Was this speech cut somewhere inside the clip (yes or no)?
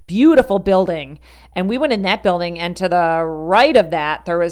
no